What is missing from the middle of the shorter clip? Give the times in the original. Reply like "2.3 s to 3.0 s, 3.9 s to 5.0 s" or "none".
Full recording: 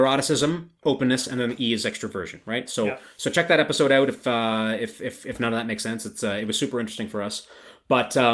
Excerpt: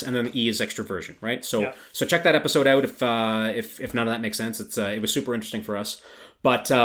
5.0 s to 5.2 s